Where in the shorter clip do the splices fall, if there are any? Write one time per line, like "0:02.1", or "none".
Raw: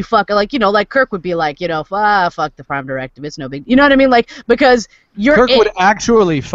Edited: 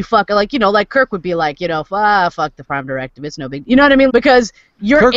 0:04.1

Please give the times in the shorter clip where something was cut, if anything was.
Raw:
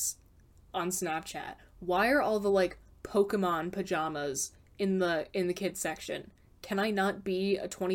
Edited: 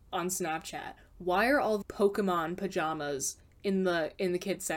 0:01.8

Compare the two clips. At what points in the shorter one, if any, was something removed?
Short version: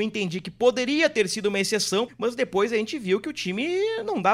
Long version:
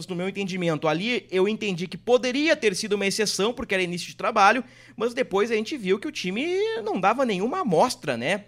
0:02.1

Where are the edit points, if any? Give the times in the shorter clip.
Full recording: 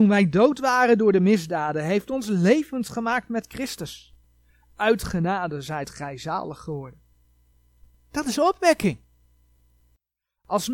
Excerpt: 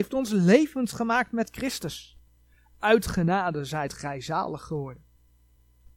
none

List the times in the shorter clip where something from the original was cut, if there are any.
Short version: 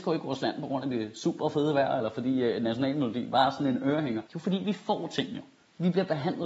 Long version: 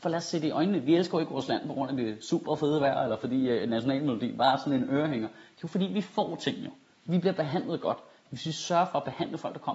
0:04.3

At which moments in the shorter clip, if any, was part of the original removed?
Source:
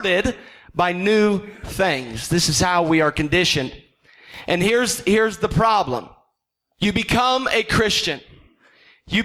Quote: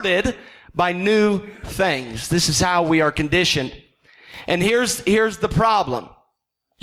none

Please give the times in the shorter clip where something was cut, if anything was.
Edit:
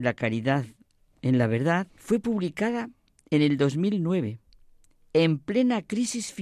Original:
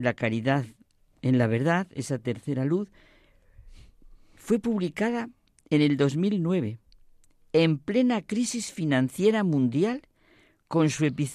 0:01.9

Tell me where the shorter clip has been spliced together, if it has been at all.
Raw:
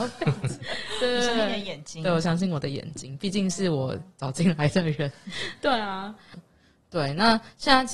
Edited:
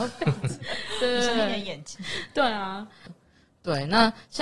0:01.9

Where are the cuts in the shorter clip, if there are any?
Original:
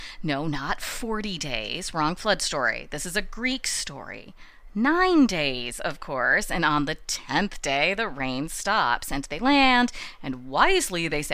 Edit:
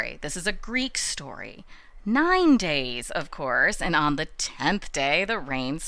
none

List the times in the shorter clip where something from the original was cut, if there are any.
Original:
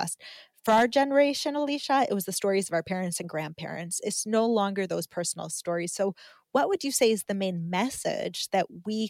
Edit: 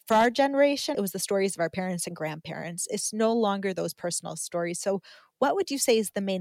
0:00.9

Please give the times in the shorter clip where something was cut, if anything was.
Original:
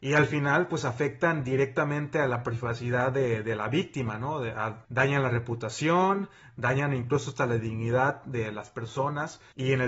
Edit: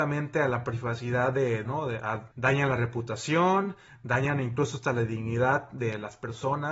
0:01.6

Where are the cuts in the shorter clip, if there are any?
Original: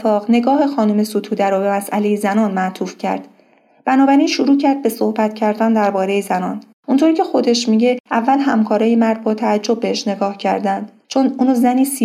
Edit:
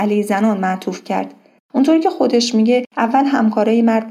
0:01.6

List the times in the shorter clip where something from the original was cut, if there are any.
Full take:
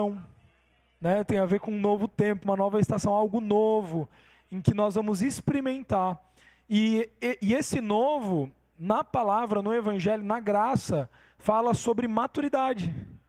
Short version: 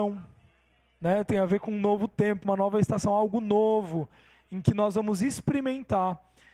none

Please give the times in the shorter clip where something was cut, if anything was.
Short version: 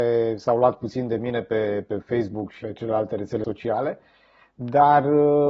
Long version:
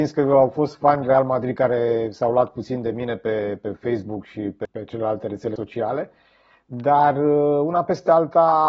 0:02.6

